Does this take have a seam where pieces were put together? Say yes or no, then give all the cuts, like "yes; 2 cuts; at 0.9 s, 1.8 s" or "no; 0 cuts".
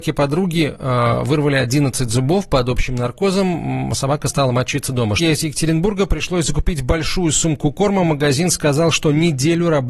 yes; 1 cut; at 5.2 s